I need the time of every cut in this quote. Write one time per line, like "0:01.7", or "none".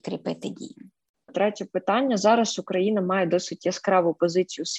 0:01.3